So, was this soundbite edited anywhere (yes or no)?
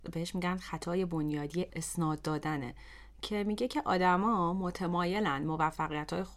yes